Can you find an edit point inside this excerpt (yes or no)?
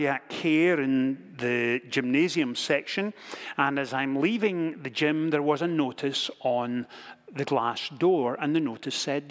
no